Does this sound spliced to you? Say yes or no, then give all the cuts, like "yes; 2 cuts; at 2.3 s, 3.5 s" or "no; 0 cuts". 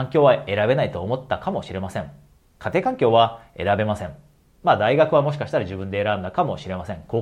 yes; 1 cut; at 4.4 s